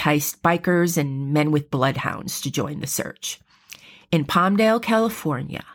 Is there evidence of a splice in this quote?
no; 0 cuts

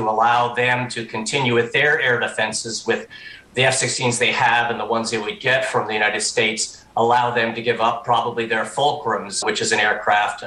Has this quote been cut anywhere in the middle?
yes; 1 cut; at 9.4 s

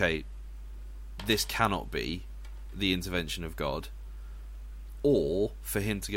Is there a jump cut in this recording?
no; 0 cuts

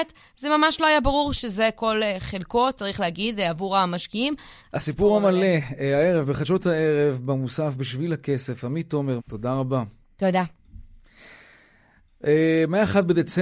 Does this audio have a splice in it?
yes; 2 cuts; at 4.6 s, 9.2 s

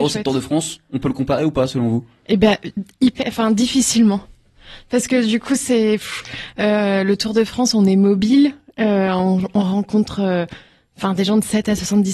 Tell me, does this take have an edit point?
no; 0 cuts

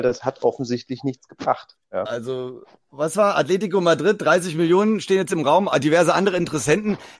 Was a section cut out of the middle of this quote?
yes; 1 cut; at 2.1 s

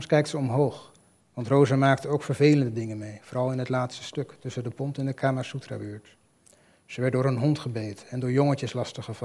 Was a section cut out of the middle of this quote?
yes; 1 cut; at 1.2 s

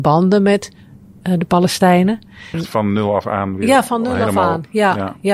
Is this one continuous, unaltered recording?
no; 1 cut; at 2.5 s

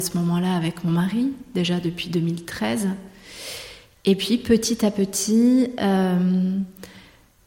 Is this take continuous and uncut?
yes; 0 cuts

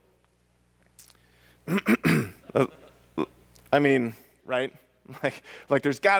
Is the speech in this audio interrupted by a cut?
yes; 2 cuts; at 2.4 s, 4.4 s

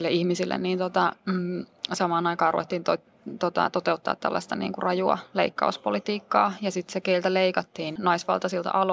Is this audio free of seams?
no; 1 cut; at 8.0 s

